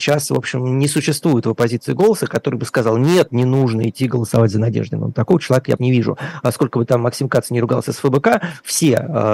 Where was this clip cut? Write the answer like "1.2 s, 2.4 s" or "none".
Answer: 5.8 s